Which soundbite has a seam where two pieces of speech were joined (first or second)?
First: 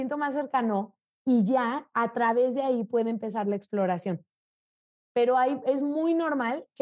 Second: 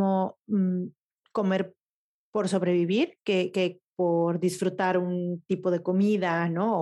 second